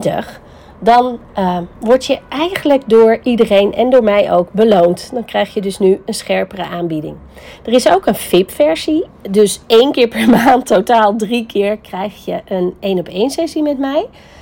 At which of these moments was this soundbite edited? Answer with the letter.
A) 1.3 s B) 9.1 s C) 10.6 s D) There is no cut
B